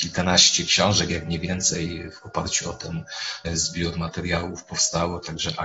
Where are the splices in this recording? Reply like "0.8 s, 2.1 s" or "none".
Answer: none